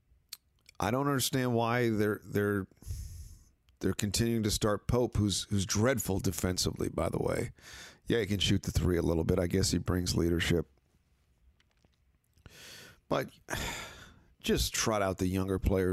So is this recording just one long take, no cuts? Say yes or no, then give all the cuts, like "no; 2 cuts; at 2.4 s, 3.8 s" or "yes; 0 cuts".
yes; 0 cuts